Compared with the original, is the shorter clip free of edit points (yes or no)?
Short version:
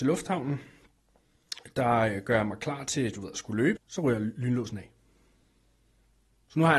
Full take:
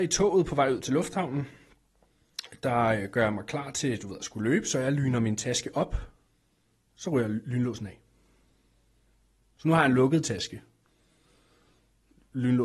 no